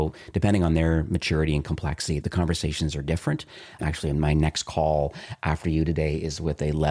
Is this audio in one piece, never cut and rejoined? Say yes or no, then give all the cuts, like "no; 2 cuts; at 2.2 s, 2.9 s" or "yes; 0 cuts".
no; 1 cut; at 3.8 s